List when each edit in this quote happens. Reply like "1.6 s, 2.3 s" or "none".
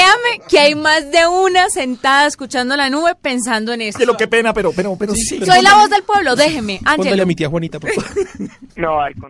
4.0 s